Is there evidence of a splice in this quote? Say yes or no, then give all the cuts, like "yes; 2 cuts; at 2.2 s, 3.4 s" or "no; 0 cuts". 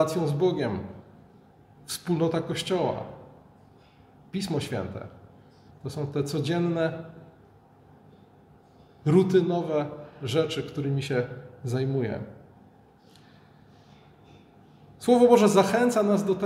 yes; 1 cut; at 5.7 s